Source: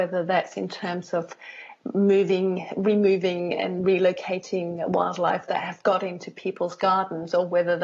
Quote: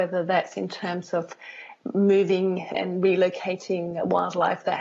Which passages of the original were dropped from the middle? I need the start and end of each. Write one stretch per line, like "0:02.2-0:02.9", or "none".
0:02.7-0:03.6

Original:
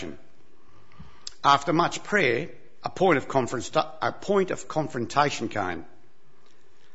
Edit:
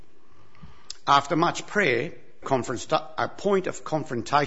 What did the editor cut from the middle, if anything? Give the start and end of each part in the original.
0:02.8-0:03.3

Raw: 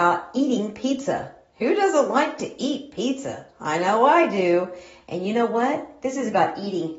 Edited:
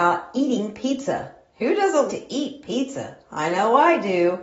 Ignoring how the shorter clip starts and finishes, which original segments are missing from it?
0:02.1-0:02.4

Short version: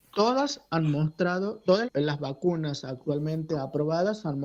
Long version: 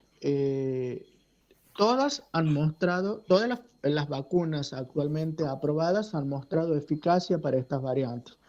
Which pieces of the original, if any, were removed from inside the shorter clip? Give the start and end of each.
0:03.5-0:03.7

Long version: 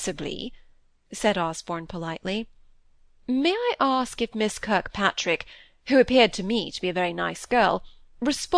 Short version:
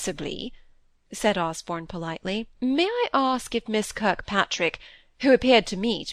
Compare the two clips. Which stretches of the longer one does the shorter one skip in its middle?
0:02.5-0:03.2

